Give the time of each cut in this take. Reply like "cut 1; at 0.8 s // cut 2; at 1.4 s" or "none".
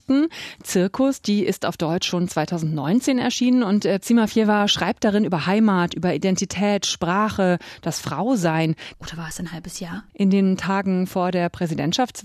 cut 1; at 8.9 s // cut 2; at 10.1 s